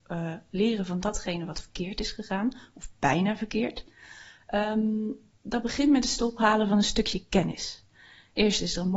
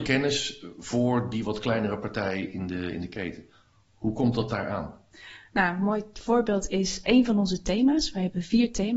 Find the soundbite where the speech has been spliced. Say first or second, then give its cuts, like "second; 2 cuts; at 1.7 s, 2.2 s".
second; 1 cut; at 7.0 s